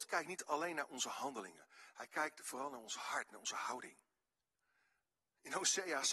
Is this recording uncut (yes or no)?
yes